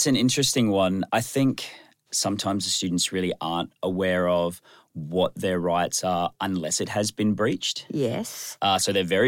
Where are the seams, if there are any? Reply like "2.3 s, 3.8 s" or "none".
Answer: none